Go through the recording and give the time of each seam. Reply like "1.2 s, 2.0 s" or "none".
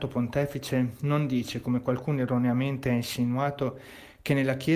none

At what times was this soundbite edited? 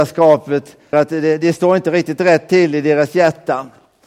0.9 s

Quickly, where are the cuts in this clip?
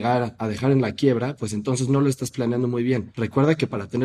none

